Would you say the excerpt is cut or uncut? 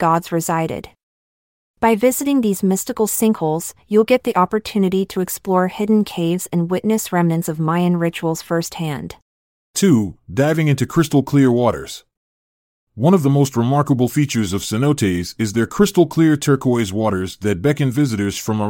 uncut